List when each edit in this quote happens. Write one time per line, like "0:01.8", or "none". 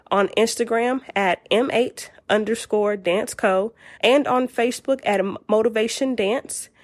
0:04.0